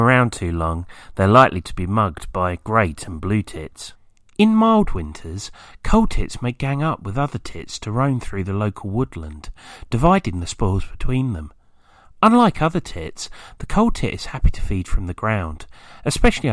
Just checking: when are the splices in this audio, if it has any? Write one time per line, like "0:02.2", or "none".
none